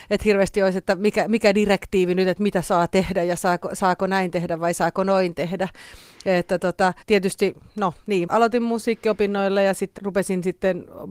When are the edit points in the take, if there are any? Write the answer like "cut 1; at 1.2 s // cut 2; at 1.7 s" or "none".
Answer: cut 1; at 7.0 s // cut 2; at 8.3 s // cut 3; at 10.0 s

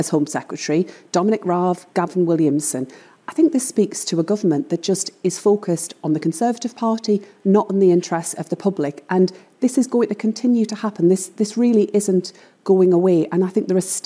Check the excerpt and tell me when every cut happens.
none

